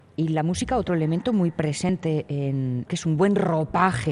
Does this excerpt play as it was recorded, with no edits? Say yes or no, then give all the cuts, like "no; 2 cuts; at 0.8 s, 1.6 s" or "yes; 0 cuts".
no; 1 cut; at 2.9 s